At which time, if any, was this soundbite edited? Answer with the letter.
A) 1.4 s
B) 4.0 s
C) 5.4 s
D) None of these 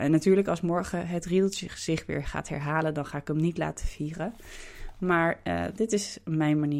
D